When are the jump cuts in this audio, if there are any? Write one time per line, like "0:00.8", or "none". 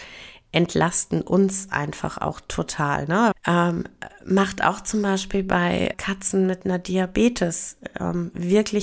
0:03.3
0:05.9

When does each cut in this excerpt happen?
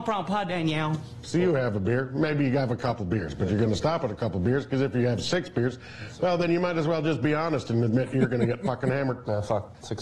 0:01.2

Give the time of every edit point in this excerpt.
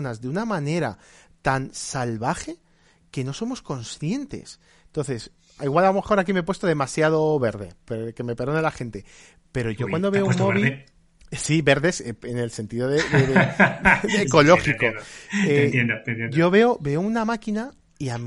none

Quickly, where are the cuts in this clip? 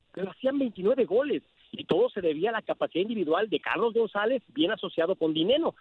none

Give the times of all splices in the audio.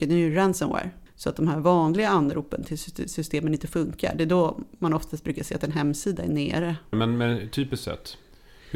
0:01.1
0:06.9

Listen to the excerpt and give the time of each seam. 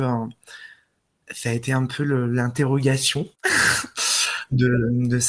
none

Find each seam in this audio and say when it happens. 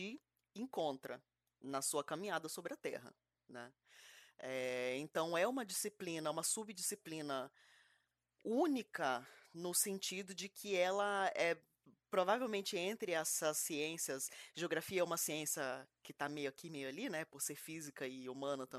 none

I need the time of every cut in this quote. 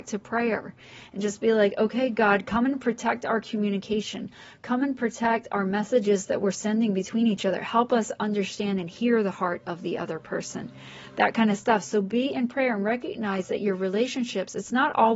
none

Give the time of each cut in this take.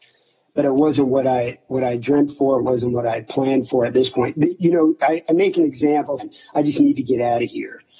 0:06.2

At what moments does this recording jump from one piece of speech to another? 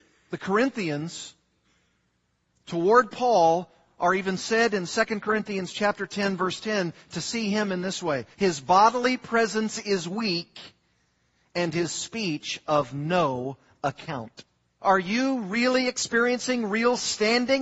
0:08.3
0:14.8

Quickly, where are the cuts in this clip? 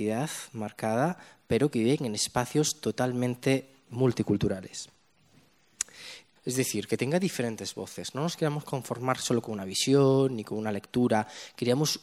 0:06.4

